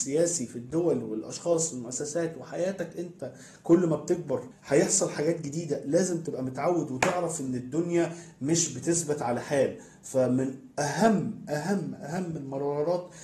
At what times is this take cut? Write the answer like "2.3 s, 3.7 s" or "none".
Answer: none